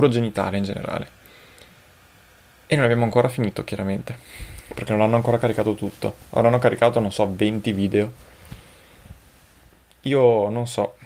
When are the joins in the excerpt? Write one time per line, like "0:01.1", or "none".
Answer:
none